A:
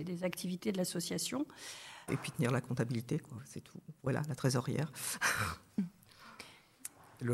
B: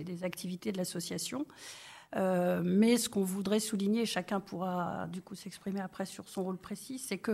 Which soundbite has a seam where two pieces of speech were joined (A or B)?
A